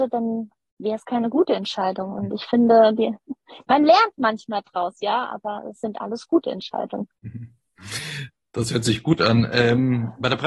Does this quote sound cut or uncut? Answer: uncut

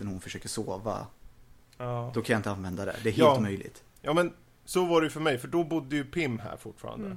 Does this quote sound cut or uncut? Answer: uncut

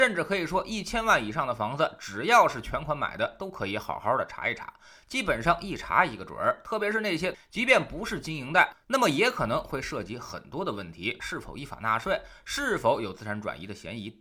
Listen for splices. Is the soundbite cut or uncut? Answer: cut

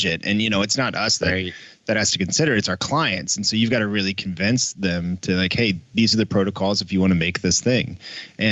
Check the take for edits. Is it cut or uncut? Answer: uncut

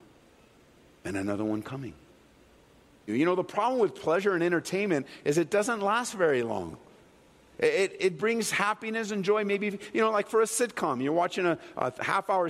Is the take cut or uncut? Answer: cut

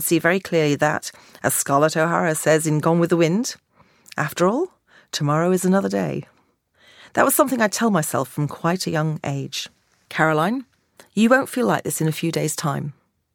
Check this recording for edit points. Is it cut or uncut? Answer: uncut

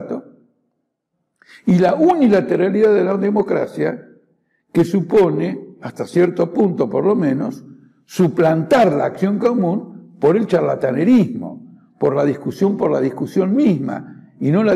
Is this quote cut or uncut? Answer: uncut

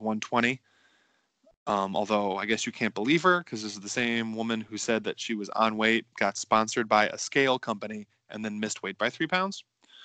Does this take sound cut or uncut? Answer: uncut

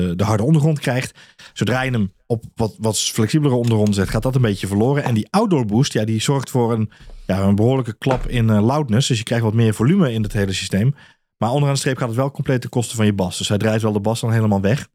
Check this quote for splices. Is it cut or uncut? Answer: uncut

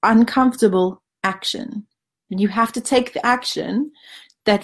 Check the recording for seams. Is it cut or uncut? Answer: uncut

